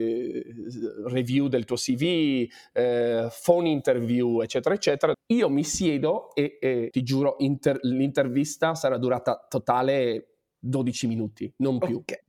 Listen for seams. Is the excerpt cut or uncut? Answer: cut